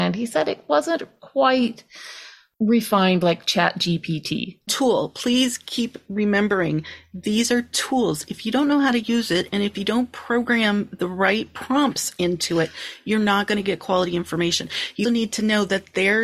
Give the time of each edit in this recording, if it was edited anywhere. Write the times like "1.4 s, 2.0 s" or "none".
4.7 s, 15.0 s

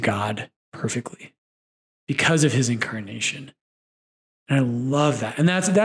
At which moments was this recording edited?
none

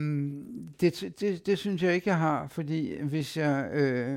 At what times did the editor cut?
1.1 s

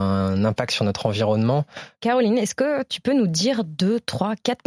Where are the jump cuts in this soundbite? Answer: 1.9 s

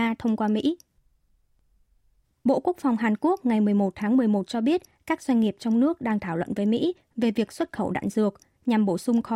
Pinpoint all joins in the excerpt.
none

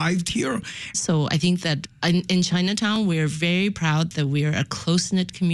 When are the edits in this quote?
0.9 s

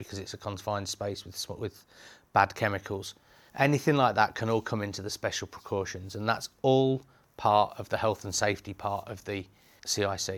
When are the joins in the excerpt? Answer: 3.5 s

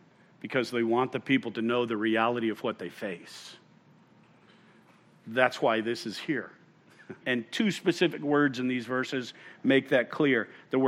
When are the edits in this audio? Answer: 7.2 s

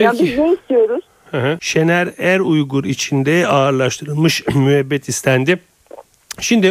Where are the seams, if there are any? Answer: 1.6 s

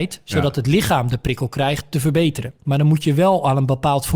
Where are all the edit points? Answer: 2.6 s

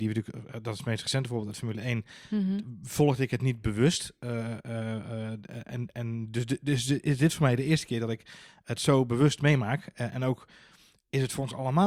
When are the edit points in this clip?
none

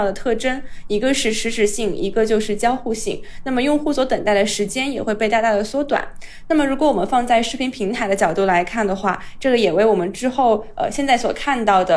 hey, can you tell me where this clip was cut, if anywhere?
none

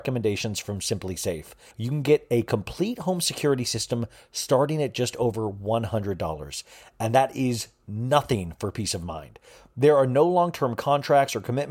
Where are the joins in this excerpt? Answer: 1.7 s

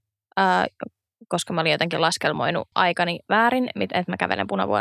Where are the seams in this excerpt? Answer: 2.7 s

